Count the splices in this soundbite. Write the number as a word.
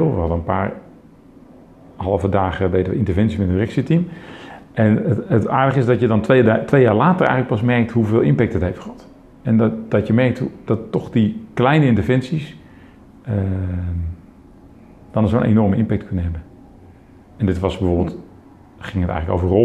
zero